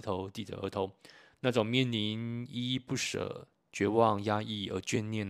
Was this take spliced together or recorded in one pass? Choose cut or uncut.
uncut